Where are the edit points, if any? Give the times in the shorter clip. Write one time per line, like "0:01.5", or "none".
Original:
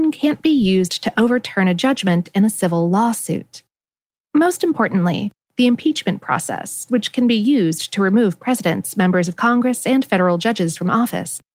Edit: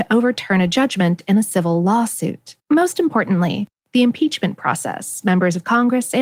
0:02.6
0:05.2

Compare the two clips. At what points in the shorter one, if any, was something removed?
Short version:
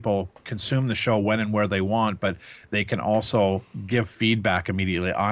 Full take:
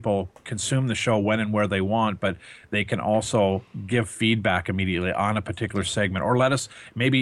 none

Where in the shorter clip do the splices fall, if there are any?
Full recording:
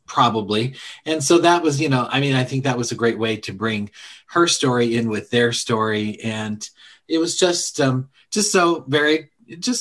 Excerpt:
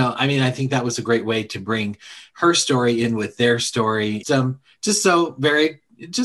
0:04.2

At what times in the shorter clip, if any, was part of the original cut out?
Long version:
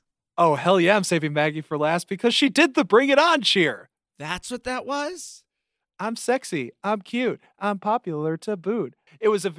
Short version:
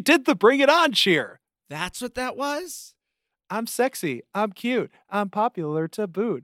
none

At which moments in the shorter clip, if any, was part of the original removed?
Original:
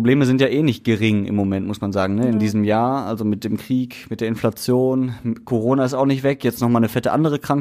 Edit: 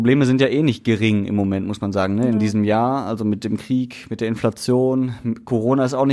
none

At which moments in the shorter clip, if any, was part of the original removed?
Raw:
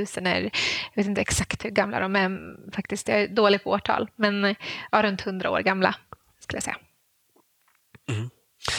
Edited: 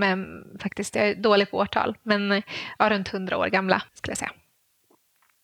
0:03.9

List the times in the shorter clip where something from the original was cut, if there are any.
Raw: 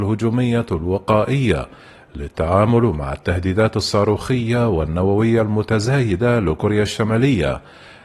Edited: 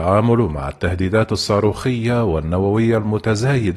none

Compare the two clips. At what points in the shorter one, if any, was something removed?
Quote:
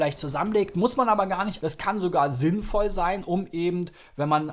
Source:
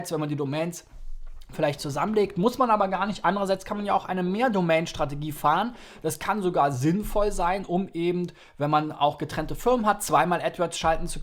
0:01.6

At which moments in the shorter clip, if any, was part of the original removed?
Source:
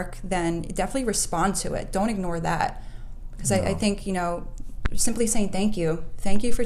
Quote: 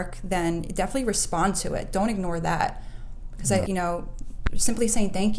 0:03.6

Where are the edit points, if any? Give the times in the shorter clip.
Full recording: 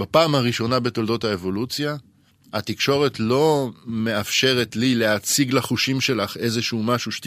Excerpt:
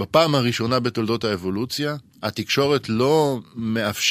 0:02.1

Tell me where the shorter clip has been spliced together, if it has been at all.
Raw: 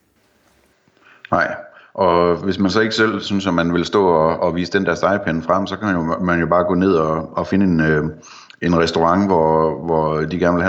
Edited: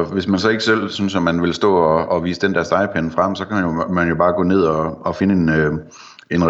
none

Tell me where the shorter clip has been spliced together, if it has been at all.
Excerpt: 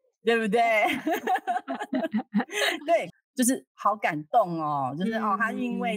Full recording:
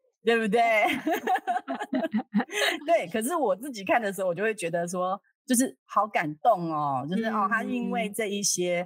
0:03.1

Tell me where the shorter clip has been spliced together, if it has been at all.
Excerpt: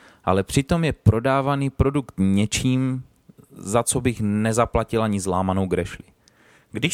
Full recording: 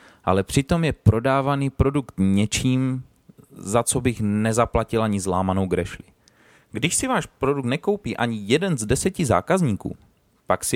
none

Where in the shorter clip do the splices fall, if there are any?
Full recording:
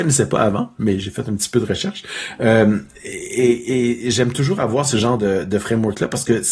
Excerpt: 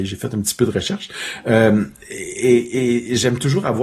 none

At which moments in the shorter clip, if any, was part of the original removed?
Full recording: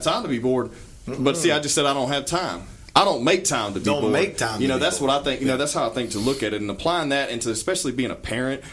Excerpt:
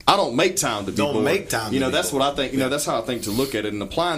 none

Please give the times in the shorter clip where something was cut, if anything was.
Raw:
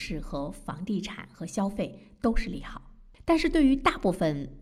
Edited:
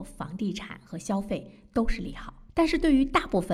0:02.5

